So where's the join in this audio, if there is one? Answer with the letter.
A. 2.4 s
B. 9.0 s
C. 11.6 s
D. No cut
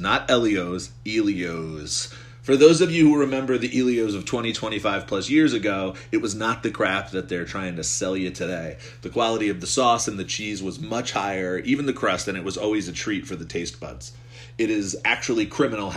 D